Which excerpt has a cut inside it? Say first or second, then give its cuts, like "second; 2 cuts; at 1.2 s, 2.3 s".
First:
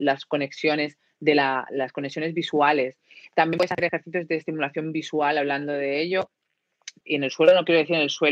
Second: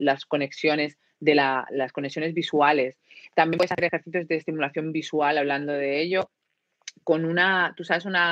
first; 1 cut; at 7.0 s